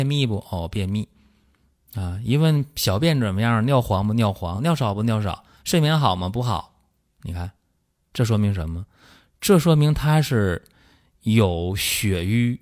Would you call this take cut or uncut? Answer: uncut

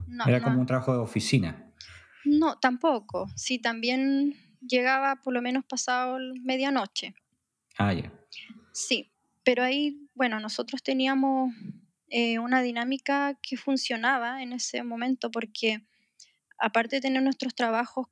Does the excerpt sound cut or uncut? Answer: uncut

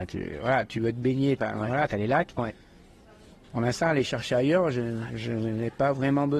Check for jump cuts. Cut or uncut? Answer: cut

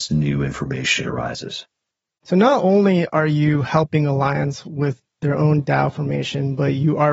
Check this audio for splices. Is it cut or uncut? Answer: uncut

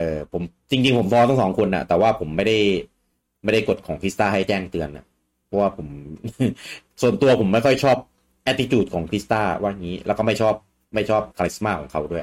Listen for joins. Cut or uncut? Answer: cut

